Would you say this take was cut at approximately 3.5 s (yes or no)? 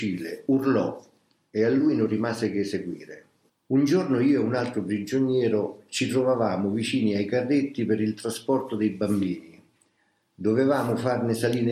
yes